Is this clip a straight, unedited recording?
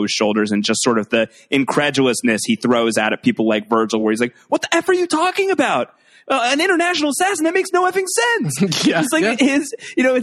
yes; 0 cuts

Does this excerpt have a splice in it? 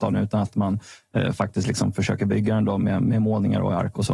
no; 0 cuts

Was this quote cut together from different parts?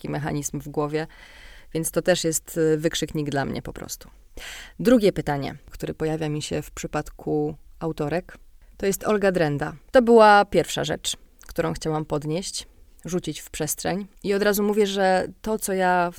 yes; 3 cuts; at 5.7 s, 9.9 s, 14.2 s

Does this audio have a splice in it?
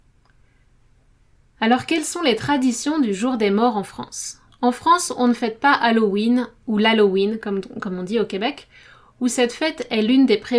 no; 0 cuts

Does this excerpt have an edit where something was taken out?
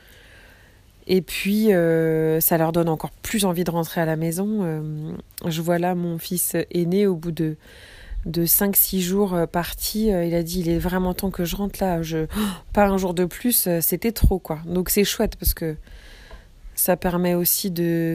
no; 0 cuts

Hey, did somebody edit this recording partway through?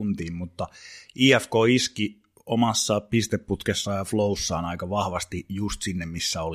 no; 0 cuts

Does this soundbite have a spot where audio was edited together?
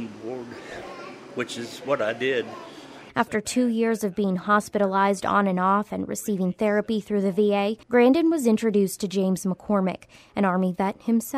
yes; 2 cuts; at 3.1 s, 7.8 s

